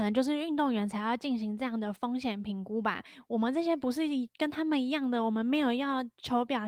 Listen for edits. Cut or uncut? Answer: uncut